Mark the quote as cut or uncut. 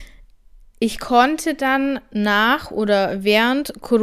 uncut